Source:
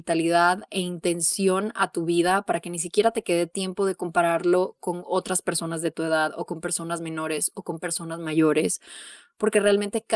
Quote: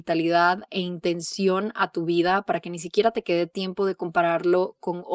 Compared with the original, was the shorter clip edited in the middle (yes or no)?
no